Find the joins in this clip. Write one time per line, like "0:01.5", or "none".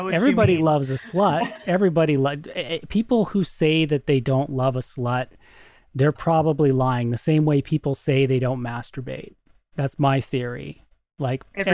none